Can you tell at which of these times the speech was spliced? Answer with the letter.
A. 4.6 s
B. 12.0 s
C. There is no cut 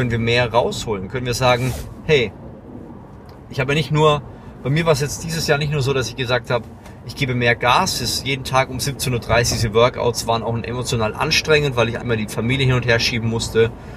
B